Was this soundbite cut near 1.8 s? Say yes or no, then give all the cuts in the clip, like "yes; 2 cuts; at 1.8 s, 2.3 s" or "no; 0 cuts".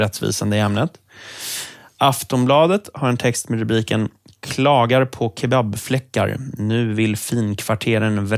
no; 0 cuts